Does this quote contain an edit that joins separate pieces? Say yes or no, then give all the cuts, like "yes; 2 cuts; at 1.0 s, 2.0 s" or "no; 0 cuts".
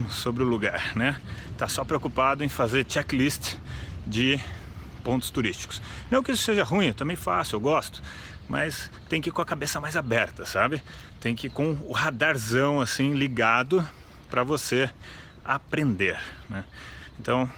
no; 0 cuts